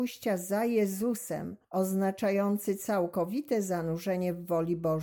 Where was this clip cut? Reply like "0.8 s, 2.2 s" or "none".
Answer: 1.6 s